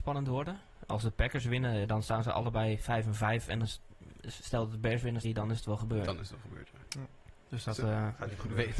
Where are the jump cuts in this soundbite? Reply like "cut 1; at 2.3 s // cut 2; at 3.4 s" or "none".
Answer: cut 1; at 5.2 s // cut 2; at 6.9 s